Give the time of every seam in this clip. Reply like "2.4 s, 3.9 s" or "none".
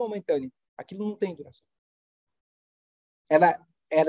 none

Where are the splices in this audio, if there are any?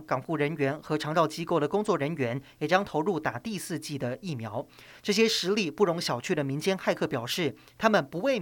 4.9 s

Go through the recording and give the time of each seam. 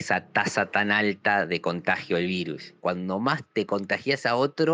2.8 s

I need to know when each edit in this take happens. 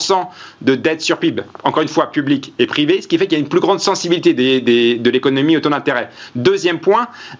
none

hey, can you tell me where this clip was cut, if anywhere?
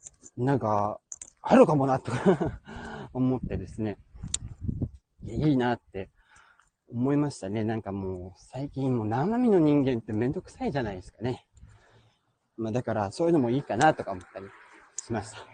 none

